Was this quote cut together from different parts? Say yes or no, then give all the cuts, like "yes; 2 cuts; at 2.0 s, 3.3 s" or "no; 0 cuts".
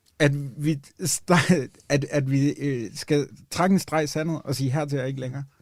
no; 0 cuts